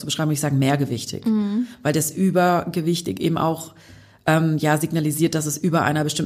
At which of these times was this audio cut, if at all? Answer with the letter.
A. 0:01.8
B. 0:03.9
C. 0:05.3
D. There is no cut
D